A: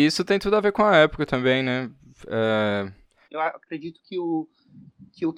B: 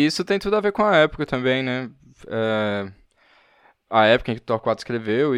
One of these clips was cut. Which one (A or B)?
A